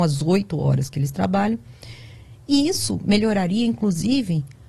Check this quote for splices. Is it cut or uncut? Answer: uncut